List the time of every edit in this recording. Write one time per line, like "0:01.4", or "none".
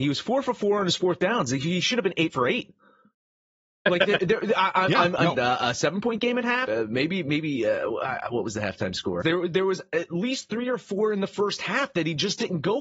0:05.3
0:06.7
0:09.2